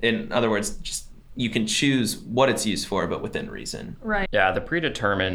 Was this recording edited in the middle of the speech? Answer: yes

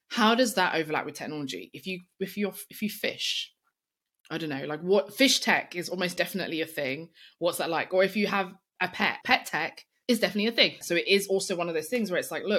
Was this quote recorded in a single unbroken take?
no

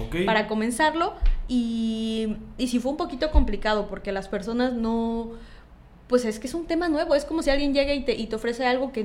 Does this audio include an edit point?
no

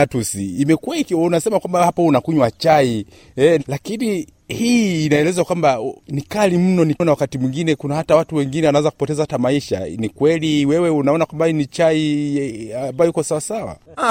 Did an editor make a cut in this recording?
yes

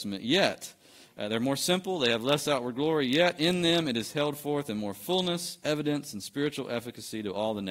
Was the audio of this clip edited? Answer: no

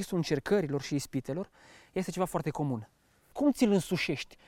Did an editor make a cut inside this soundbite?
yes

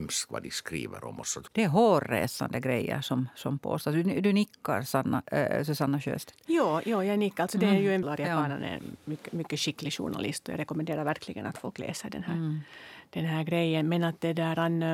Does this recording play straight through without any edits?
no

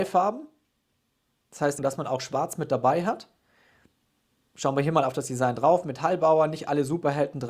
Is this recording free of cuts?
no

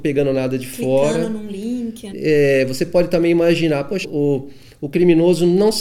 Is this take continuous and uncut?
no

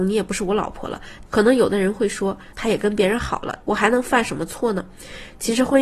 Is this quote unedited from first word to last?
no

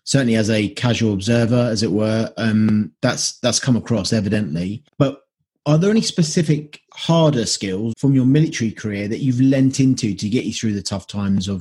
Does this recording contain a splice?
yes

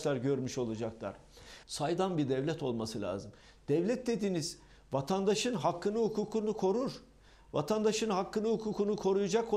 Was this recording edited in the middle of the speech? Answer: yes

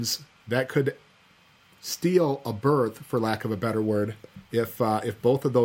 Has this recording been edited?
no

